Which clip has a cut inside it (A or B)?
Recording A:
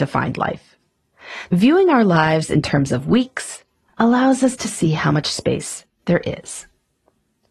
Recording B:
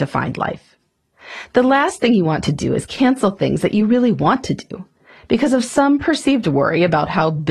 A